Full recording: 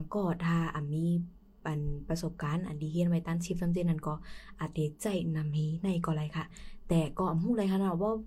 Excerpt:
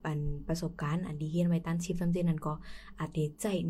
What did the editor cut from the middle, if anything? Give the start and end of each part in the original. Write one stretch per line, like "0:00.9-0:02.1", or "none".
none